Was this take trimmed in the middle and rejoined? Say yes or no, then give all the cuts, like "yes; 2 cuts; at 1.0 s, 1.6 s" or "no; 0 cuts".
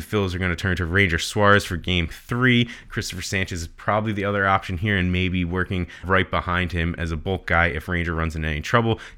yes; 1 cut; at 6.0 s